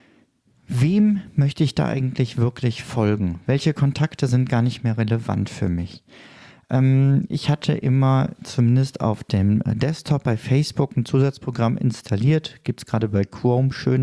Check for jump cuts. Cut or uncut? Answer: uncut